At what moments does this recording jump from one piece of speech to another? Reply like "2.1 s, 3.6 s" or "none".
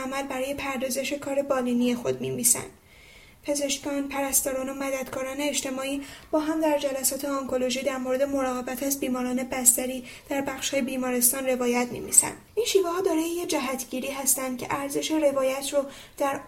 12.5 s